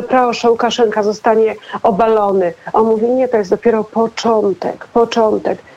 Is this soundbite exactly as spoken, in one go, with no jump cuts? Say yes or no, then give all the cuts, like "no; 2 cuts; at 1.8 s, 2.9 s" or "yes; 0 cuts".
yes; 0 cuts